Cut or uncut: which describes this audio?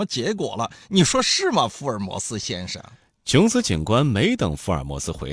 uncut